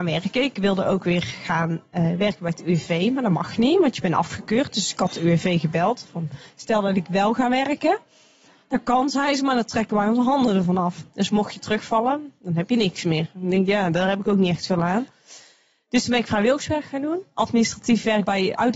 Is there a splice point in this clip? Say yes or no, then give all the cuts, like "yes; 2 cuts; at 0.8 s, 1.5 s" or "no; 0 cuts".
no; 0 cuts